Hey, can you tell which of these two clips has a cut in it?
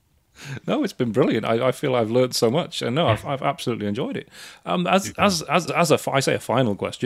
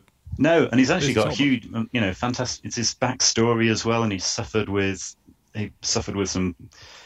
first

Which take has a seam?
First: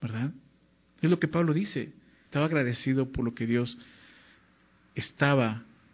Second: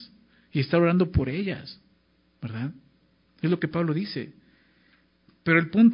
first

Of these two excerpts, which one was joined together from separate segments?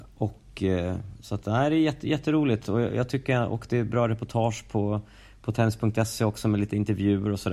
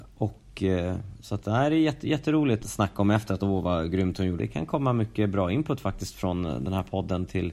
second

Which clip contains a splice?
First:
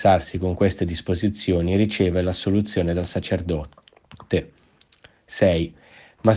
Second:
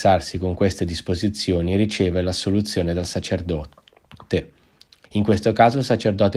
second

